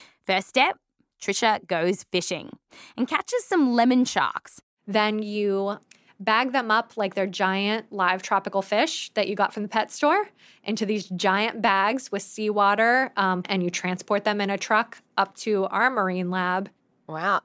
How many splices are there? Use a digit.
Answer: 1